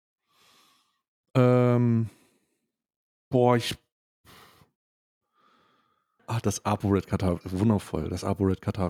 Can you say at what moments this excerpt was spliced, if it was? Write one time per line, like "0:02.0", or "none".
0:06.2